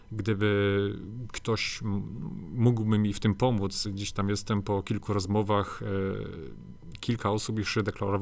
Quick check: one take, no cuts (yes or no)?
yes